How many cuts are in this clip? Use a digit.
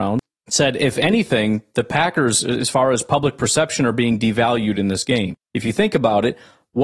0